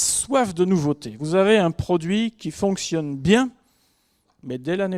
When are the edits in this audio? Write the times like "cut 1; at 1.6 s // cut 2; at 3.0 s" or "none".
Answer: none